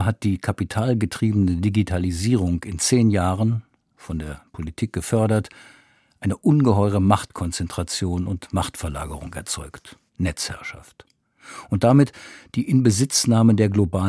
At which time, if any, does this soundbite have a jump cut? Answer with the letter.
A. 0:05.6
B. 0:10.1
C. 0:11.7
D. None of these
B